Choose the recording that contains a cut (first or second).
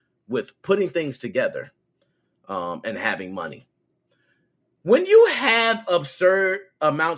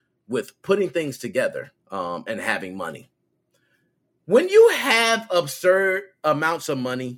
second